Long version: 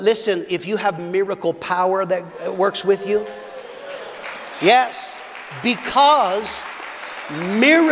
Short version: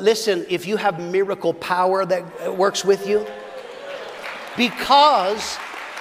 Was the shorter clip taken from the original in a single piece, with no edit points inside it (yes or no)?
no